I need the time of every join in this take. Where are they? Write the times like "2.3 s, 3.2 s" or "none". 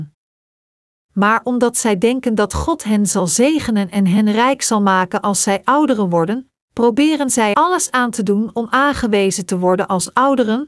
7.5 s